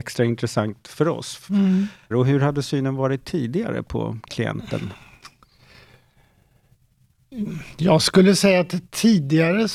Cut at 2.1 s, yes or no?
yes